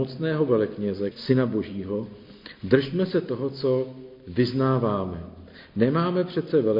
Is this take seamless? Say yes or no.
no